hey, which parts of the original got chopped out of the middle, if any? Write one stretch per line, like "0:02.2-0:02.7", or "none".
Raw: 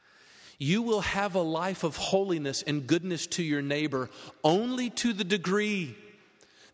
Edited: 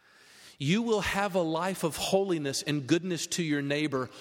none